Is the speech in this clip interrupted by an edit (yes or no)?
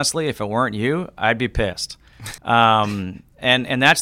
yes